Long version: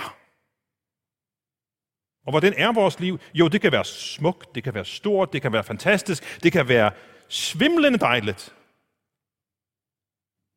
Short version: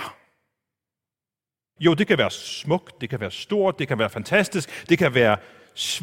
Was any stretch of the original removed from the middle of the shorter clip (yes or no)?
yes